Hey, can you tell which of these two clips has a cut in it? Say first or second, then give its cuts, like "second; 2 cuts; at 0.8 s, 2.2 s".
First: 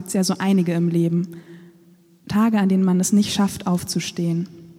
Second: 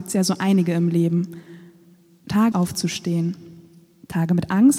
second; 1 cut; at 2.5 s